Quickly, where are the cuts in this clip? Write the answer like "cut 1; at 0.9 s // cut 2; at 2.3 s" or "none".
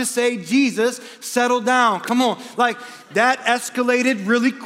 none